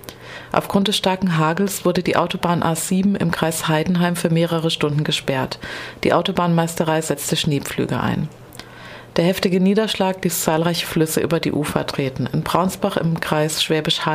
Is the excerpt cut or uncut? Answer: uncut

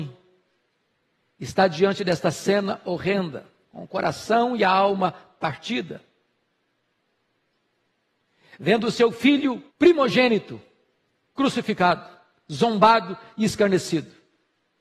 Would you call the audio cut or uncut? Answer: cut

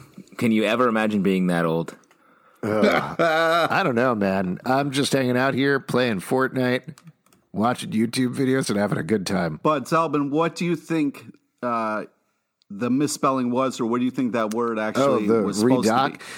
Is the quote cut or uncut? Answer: uncut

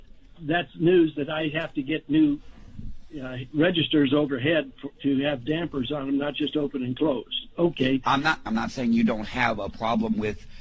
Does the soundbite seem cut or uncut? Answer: cut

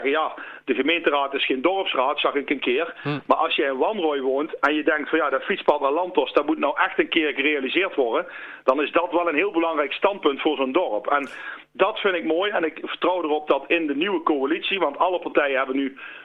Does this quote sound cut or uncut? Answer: uncut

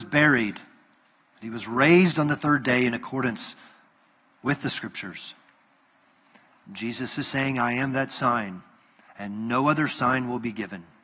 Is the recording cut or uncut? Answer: uncut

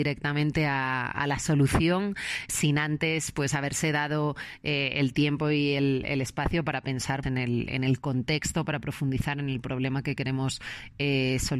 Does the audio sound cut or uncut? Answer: cut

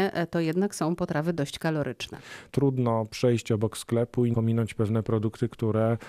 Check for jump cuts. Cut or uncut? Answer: cut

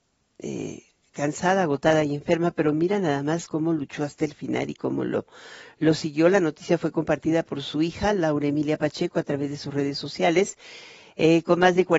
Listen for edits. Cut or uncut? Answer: uncut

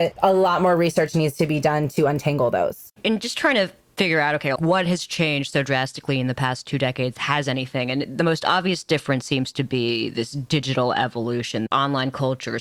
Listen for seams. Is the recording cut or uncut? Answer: cut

